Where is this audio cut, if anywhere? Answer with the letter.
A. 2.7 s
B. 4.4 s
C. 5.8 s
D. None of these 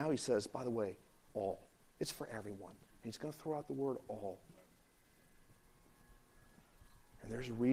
D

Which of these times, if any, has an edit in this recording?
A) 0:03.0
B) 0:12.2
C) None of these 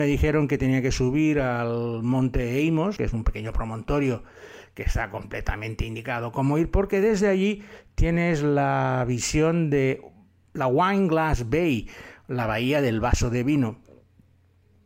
A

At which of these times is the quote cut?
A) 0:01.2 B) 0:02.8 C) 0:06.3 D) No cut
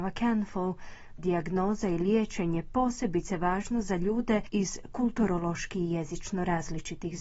A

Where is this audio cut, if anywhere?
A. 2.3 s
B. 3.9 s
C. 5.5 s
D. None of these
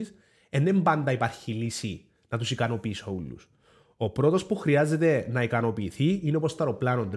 D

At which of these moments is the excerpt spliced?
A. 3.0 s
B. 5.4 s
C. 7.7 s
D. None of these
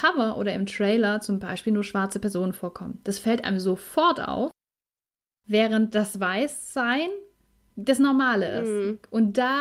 C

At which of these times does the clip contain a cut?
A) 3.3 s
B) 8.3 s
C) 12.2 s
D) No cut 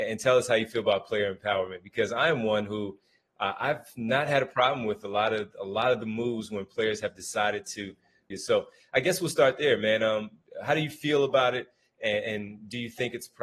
B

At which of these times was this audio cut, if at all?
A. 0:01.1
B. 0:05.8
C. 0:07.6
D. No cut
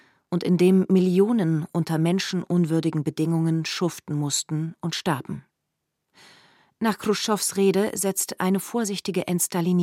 D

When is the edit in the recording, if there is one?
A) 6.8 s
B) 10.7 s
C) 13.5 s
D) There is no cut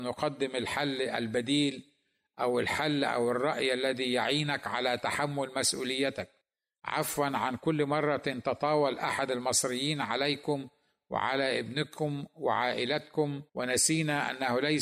C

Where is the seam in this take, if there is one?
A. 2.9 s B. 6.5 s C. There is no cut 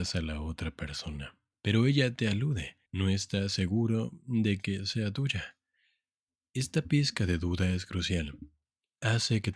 A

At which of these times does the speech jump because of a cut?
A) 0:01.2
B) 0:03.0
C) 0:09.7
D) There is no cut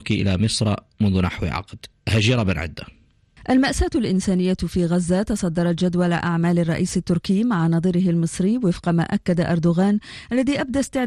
D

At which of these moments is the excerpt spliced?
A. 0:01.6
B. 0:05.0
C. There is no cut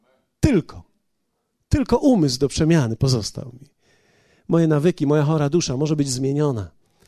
C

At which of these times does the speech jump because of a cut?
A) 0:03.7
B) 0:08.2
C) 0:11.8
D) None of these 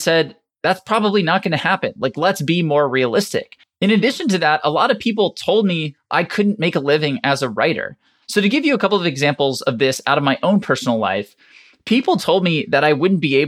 B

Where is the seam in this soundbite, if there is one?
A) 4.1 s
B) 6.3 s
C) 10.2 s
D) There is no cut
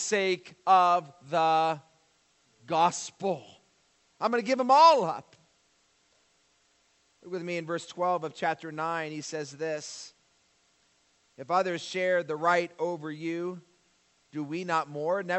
A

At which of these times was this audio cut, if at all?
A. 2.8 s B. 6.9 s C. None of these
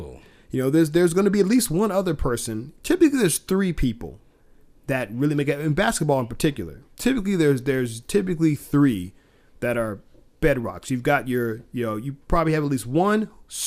C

